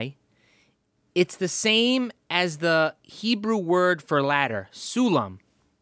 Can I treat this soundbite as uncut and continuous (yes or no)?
yes